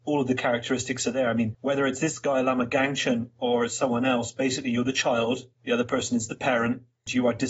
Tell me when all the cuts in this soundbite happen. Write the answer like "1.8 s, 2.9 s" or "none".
5.6 s